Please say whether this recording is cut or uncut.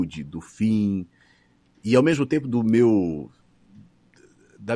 uncut